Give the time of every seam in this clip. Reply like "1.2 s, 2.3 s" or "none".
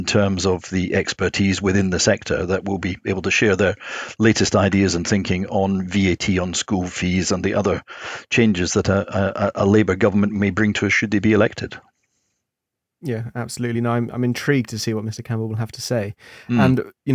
none